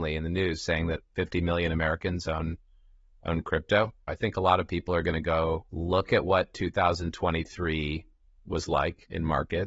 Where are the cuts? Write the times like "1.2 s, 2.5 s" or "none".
4.1 s, 5.7 s